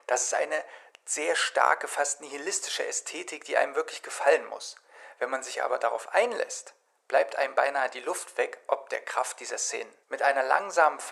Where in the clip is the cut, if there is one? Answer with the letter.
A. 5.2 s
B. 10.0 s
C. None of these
B